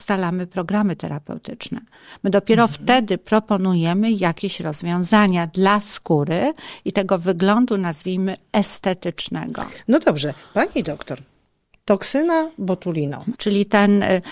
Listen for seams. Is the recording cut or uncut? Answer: cut